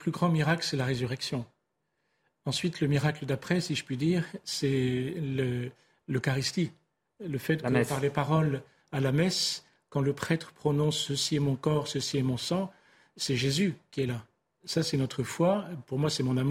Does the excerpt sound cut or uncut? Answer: uncut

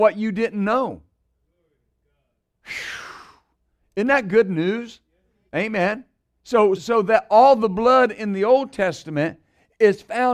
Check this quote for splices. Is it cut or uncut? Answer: cut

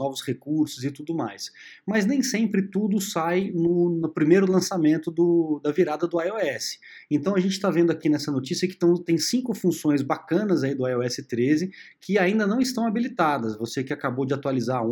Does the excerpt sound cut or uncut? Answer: uncut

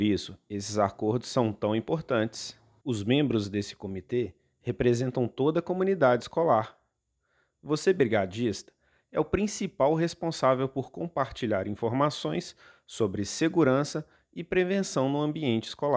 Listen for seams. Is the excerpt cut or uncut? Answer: cut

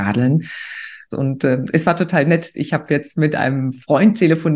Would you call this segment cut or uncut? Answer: cut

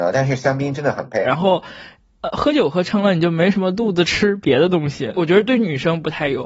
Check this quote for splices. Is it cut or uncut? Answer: cut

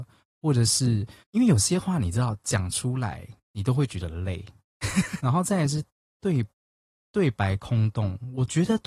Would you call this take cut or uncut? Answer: cut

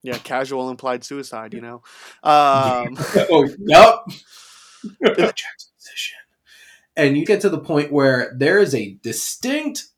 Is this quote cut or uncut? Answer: cut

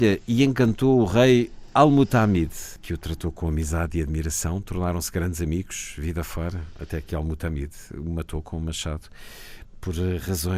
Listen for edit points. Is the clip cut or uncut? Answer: uncut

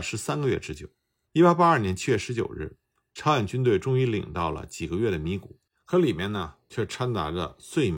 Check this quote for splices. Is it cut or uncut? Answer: cut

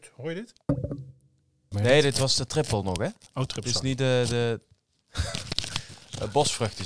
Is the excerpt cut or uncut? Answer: cut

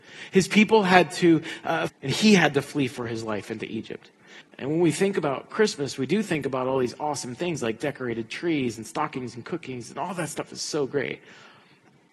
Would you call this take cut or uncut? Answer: cut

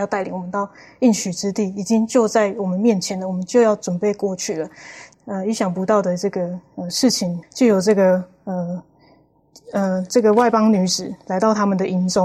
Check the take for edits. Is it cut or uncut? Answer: cut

